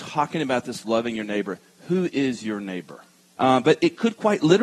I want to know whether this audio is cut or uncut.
cut